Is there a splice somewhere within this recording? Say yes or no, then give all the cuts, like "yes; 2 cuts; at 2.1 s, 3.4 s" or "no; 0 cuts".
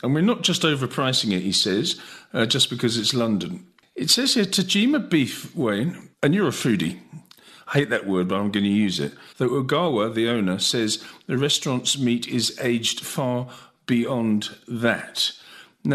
yes; 2 cuts; at 6.1 s, 9.3 s